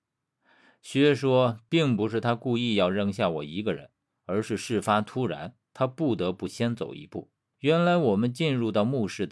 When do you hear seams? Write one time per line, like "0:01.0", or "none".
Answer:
0:07.5